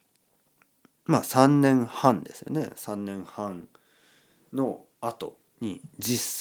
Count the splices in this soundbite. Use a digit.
1